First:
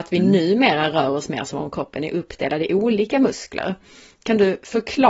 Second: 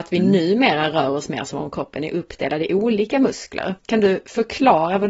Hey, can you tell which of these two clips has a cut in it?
second; 1 cut; at 3.8 s

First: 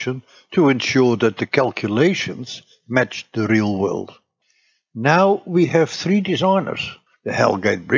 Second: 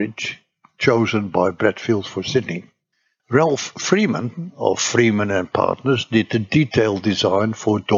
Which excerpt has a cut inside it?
second; 1 cut; at 3.2 s

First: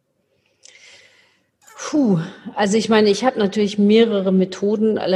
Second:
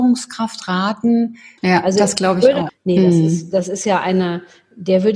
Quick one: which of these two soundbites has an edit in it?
second; 2 cuts; at 1.6 s, 2.7 s

